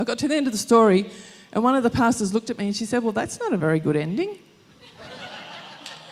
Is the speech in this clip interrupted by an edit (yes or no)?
no